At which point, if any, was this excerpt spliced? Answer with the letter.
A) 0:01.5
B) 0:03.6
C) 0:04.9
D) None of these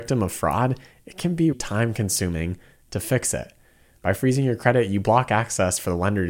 A